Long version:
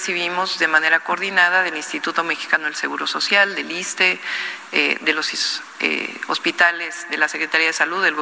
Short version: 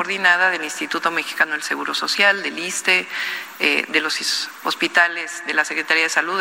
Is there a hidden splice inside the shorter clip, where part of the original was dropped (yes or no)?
yes